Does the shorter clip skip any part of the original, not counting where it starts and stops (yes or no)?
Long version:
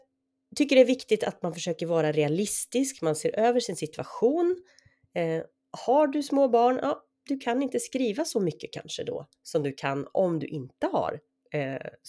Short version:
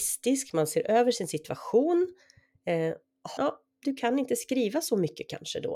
yes